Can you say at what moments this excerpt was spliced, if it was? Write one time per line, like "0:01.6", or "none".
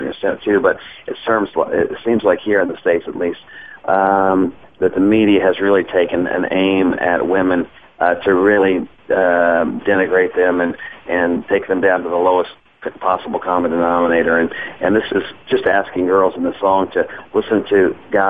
none

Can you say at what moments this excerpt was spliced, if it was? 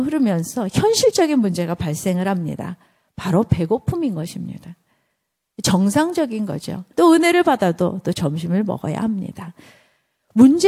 0:06.9

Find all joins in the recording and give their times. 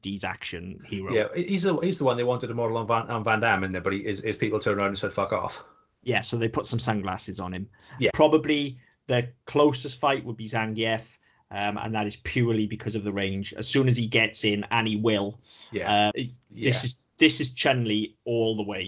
0:08.1
0:16.1

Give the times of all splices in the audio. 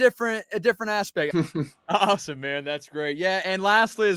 0:01.3

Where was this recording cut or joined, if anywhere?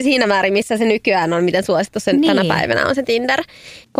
none

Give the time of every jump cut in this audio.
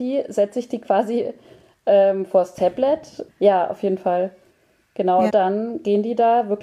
0:03.3
0:05.3

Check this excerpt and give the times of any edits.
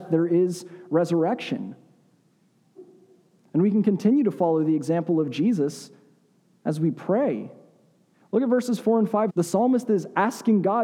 0:08.1
0:09.3

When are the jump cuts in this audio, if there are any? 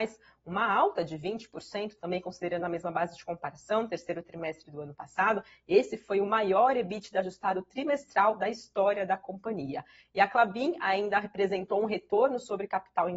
none

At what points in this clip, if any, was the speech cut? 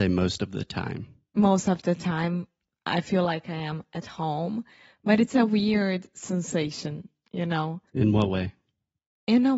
0:07.9

